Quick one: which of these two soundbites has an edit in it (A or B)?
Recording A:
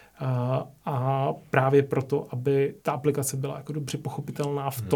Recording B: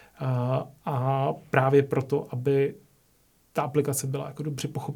A